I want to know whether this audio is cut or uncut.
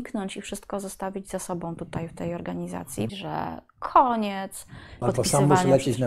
cut